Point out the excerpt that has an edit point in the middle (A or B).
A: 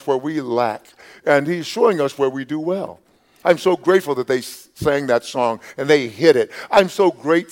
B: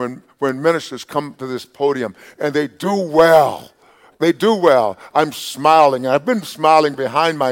A